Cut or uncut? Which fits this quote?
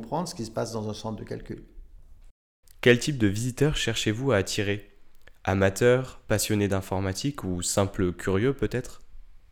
uncut